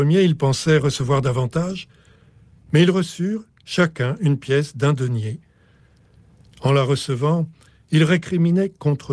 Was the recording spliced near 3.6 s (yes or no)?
yes